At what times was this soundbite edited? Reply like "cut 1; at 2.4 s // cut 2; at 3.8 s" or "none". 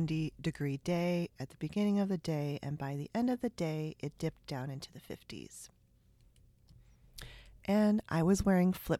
none